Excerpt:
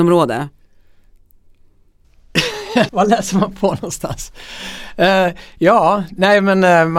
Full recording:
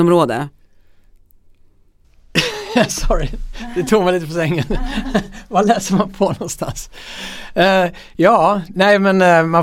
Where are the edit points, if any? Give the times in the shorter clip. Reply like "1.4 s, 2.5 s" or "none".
2.9 s